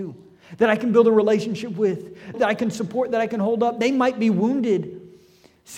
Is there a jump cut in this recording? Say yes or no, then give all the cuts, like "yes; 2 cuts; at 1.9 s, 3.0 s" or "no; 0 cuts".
yes; 1 cut; at 2.3 s